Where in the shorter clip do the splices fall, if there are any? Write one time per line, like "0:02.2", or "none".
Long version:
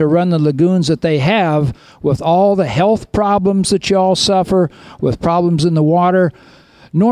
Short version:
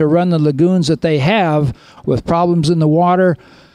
0:02.0